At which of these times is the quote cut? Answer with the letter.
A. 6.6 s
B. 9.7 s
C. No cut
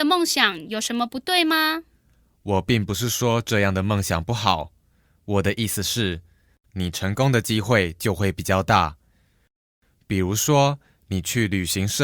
A